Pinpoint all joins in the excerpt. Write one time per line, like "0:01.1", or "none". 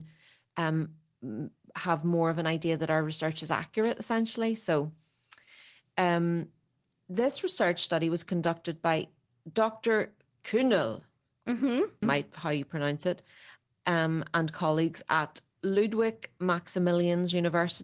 0:12.0
0:15.5